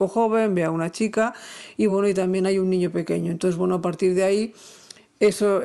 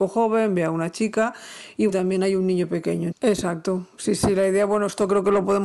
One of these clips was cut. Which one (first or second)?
second